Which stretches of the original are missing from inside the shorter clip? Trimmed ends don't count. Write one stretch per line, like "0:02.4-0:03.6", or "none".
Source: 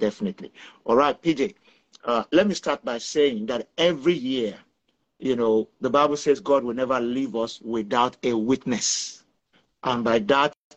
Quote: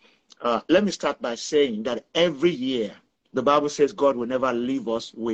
0:04.9-0:05.8